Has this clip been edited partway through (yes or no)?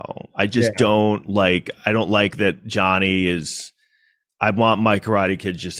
no